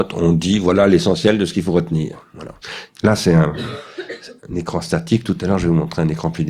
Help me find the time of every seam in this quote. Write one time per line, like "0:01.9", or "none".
0:02.9
0:04.4